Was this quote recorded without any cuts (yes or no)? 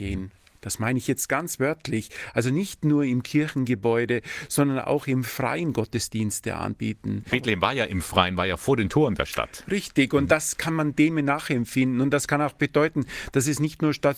no